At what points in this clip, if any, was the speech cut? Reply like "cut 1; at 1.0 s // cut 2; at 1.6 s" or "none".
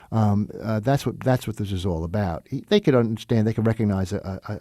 none